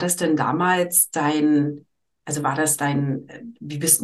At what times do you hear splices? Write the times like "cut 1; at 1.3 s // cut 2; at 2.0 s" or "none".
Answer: none